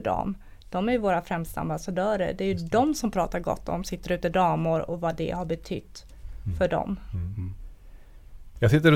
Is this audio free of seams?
yes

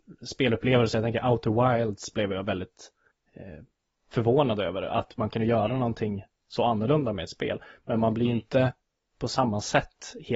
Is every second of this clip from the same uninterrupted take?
yes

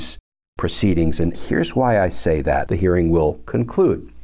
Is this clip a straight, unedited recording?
no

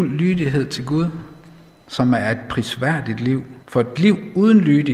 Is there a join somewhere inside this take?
yes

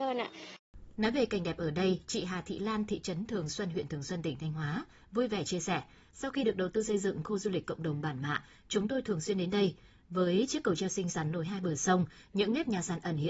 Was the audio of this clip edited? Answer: no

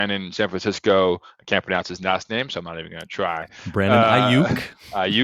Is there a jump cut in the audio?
no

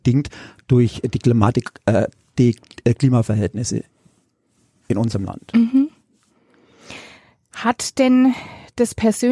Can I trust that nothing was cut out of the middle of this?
yes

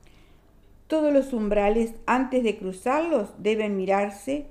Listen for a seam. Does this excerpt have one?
no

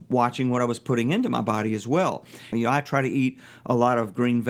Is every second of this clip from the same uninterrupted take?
no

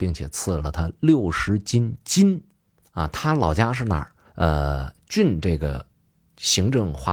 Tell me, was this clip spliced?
yes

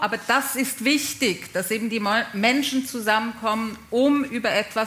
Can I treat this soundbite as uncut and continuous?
yes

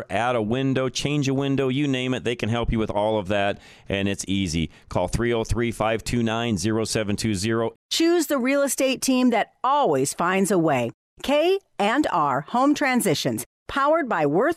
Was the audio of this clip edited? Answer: yes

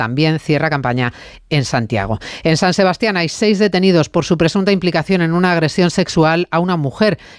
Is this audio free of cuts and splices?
yes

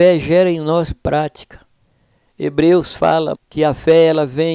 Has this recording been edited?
yes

